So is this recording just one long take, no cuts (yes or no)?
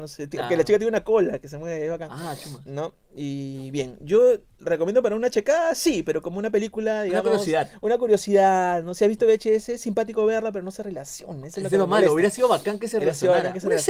yes